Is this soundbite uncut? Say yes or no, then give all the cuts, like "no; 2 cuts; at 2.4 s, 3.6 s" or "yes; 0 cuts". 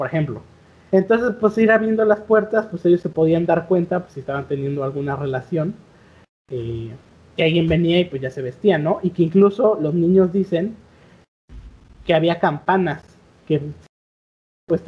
yes; 0 cuts